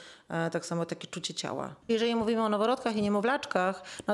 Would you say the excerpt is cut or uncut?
cut